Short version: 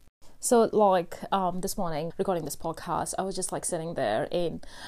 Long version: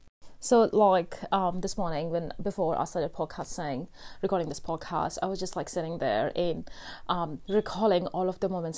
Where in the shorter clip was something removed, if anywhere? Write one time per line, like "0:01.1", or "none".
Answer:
0:02.1